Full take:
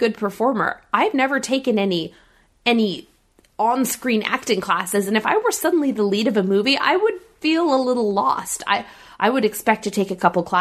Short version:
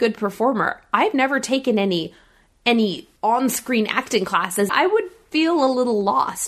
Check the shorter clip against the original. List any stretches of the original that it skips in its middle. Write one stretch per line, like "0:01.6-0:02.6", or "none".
0:03.2-0:03.5
0:05.1-0:06.8